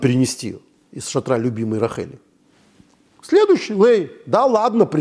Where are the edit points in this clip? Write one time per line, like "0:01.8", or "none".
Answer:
none